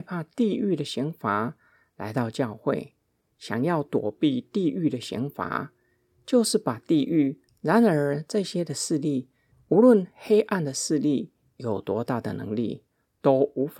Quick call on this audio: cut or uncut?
cut